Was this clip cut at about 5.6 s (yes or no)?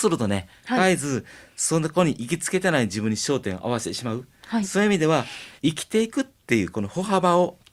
yes